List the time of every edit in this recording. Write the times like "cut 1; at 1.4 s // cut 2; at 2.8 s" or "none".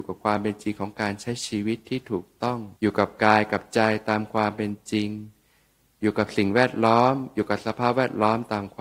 cut 1; at 2.8 s

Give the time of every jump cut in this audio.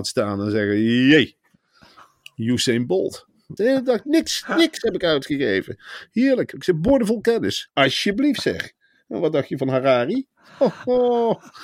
cut 1; at 3.6 s // cut 2; at 7.7 s

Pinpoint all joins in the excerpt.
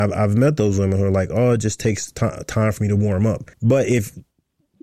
cut 1; at 3.5 s

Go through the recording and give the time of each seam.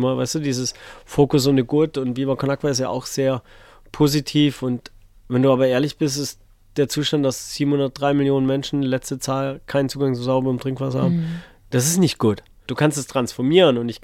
cut 1; at 12.7 s

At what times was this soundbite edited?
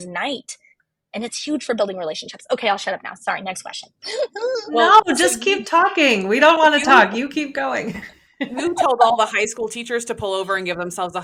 none

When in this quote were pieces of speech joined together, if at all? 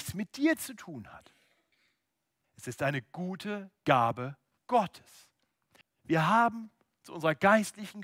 cut 1; at 2.4 s // cut 2; at 5.8 s

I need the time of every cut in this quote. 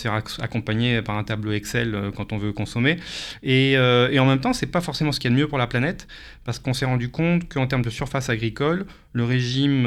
none

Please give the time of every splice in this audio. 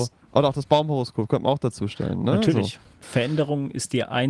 cut 1; at 3.0 s

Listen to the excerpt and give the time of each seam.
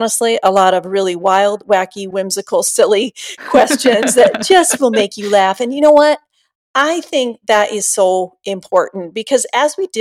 cut 1; at 2.1 s

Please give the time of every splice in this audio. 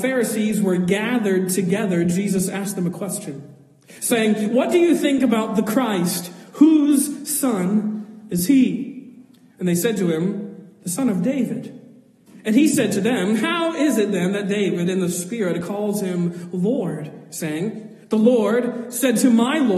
none

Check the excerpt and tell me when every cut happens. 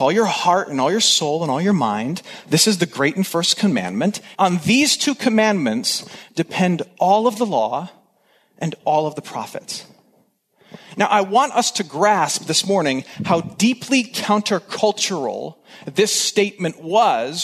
cut 1; at 4.3 s

